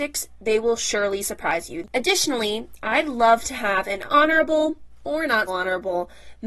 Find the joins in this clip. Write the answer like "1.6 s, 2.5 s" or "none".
1.8 s, 5.5 s